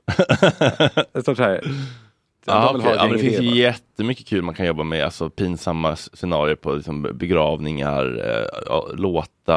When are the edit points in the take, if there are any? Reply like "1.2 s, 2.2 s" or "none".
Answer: 2.4 s